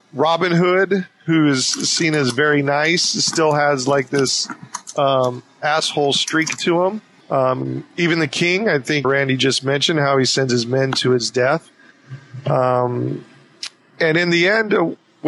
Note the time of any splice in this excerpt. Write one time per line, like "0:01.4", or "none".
0:07.2
0:09.0